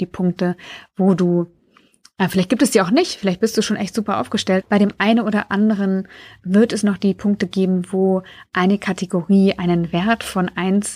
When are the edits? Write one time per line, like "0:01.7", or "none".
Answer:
0:04.6